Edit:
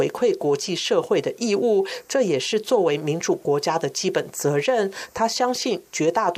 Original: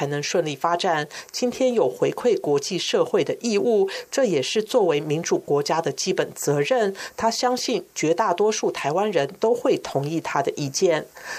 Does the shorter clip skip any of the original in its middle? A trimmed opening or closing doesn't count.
no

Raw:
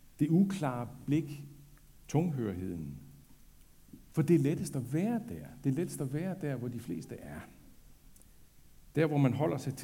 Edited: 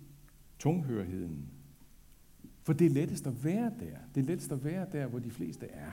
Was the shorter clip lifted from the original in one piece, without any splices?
yes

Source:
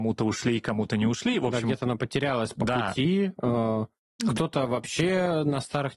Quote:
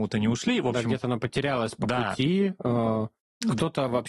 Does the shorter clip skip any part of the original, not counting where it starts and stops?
no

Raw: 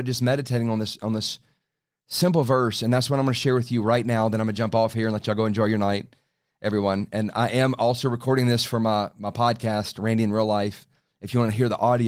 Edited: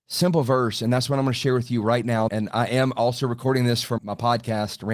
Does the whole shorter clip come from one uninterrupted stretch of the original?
no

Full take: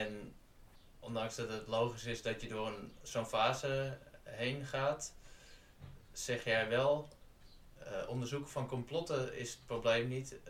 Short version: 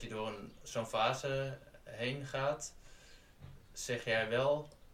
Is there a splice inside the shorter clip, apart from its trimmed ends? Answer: no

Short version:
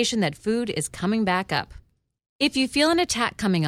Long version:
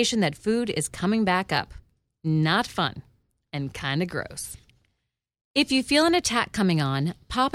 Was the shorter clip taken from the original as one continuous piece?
no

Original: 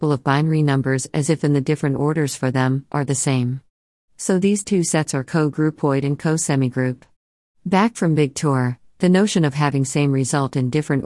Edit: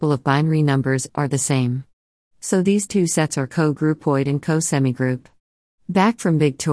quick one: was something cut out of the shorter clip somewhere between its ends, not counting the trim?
yes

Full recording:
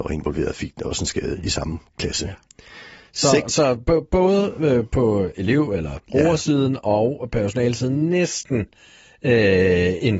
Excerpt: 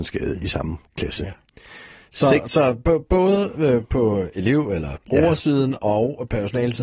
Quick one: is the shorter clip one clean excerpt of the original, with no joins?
yes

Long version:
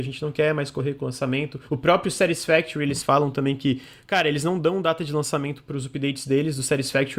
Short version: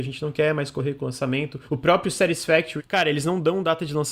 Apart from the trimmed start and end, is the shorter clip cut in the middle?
yes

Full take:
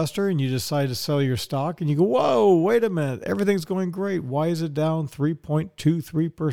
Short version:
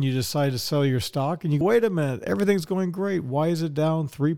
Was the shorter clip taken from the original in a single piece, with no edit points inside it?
no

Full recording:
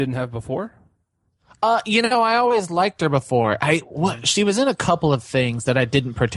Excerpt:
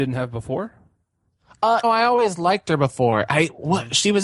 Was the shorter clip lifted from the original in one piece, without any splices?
no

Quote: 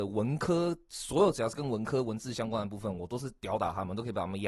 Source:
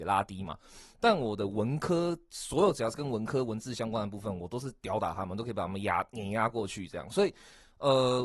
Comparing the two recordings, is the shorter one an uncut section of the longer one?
yes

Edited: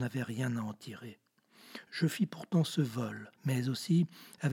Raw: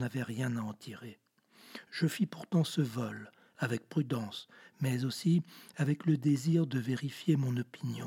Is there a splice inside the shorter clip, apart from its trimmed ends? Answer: yes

